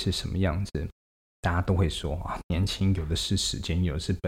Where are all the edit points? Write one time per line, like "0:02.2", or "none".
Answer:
0:01.3